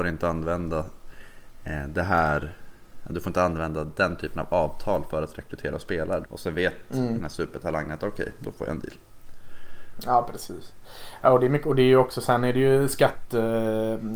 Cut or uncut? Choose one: cut